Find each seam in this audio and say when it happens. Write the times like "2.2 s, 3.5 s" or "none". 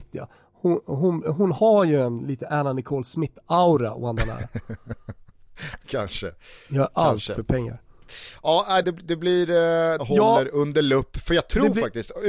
8.8 s, 10.0 s